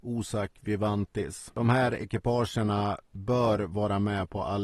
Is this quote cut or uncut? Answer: uncut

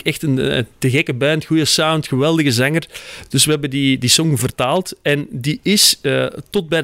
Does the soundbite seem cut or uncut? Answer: uncut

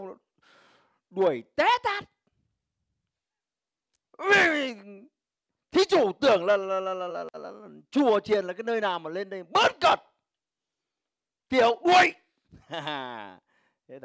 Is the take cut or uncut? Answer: cut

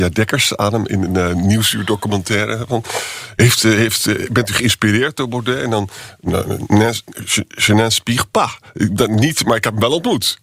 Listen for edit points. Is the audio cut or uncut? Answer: uncut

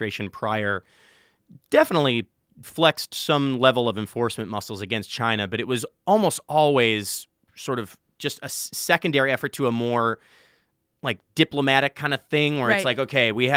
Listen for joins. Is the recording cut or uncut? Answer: uncut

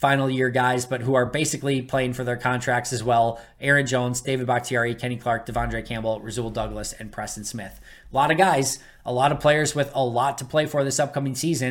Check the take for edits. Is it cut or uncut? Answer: uncut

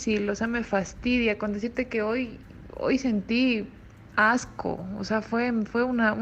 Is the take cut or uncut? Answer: uncut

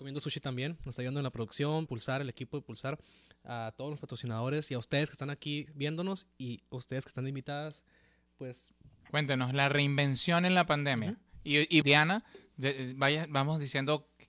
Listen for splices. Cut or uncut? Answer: cut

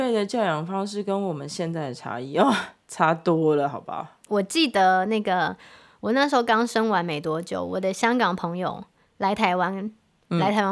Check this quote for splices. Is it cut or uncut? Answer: cut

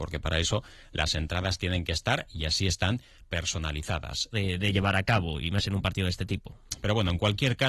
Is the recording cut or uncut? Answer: cut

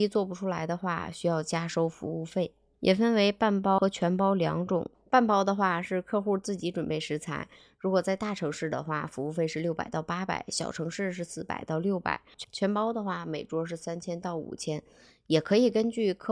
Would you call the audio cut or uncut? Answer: uncut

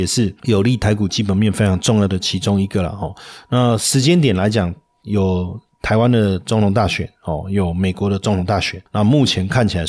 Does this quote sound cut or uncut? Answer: uncut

